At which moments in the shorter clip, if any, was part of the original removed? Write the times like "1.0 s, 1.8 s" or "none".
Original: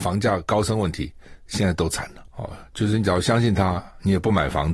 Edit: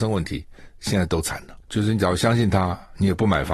1.6 s